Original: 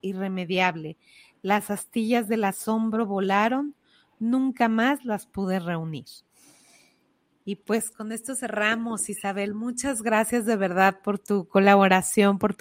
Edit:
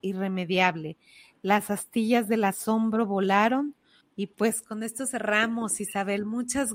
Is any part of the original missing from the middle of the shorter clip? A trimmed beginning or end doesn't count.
yes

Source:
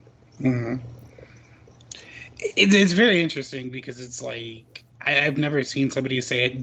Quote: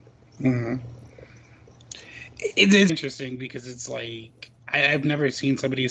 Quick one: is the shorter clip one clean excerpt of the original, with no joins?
no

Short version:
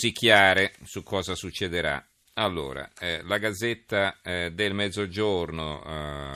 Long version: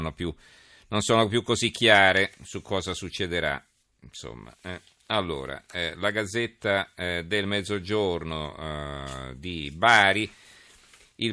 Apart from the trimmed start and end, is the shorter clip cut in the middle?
yes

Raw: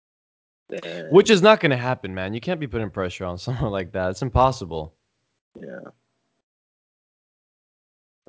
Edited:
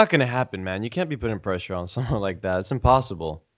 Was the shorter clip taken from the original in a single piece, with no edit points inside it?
yes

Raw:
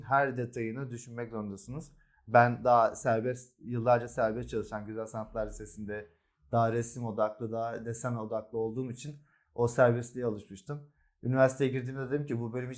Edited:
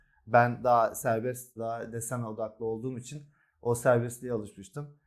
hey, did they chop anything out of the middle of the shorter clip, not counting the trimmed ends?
yes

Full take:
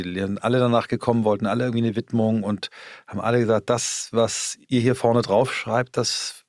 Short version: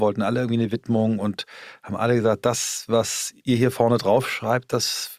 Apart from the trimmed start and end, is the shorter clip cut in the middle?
no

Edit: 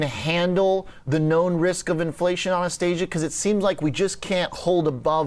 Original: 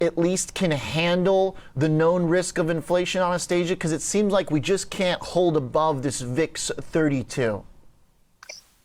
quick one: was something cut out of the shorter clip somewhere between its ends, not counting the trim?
no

